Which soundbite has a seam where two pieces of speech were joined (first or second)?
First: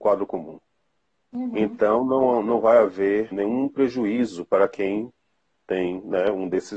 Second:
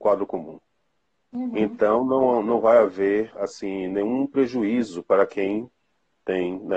first